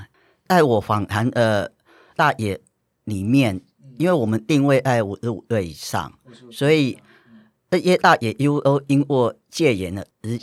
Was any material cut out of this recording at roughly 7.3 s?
no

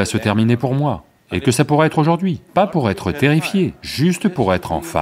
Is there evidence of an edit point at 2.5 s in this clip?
yes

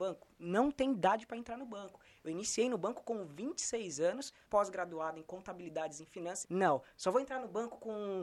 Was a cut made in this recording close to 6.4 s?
yes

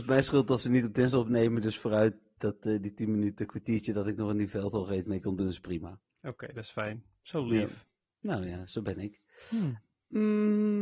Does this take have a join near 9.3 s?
no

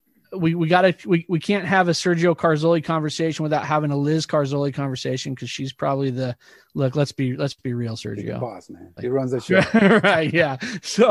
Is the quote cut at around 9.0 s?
yes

